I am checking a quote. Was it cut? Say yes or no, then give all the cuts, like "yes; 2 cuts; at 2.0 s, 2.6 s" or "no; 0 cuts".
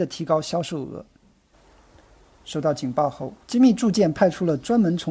yes; 2 cuts; at 1.5 s, 3.4 s